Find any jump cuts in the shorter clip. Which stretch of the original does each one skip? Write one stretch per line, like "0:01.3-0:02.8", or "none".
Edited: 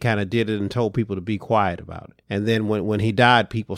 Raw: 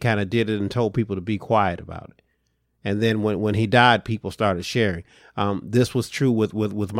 0:02.2-0:02.8